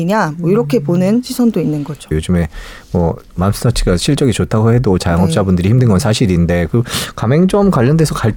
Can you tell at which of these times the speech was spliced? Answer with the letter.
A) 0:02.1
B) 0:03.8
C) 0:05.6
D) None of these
A